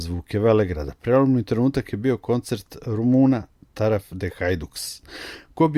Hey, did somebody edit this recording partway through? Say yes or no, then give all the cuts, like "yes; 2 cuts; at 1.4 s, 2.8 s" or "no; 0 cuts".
no; 0 cuts